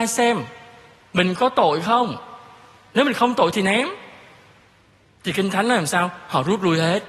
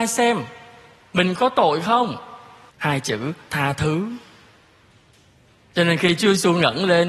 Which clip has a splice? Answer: second; 1 cut; at 2.7 s

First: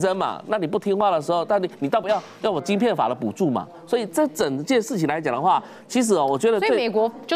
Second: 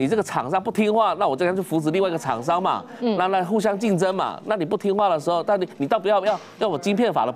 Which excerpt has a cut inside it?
first; 1 cut; at 2.0 s

